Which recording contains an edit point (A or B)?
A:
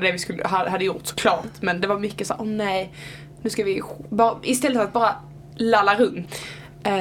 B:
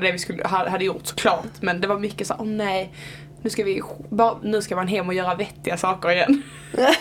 B